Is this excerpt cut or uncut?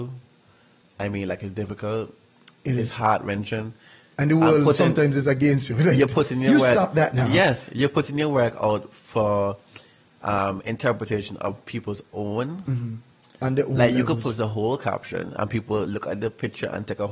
uncut